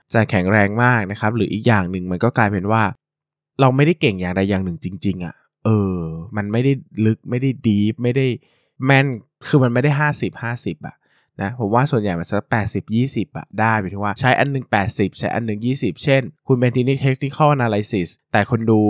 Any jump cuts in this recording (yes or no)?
no